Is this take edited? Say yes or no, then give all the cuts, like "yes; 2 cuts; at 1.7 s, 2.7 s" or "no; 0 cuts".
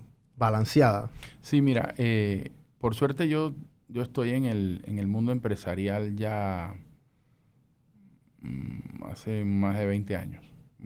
no; 0 cuts